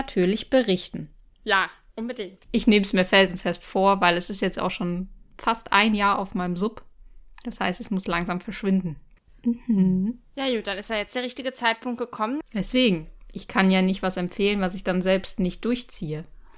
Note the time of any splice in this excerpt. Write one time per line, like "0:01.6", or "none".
0:09.3
0:12.4